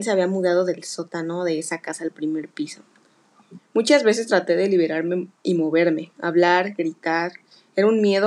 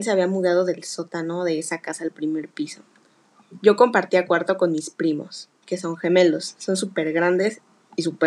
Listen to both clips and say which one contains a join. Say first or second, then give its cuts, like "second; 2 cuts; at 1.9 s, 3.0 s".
first; 1 cut; at 3.6 s